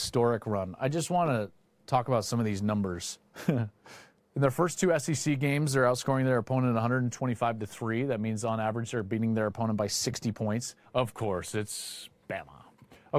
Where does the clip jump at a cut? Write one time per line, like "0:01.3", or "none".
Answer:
0:10.8